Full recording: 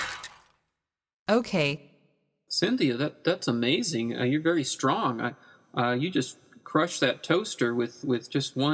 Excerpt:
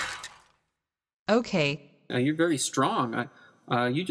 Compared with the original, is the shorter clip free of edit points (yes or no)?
no